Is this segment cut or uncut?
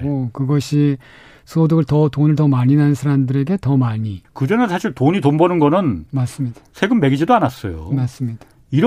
cut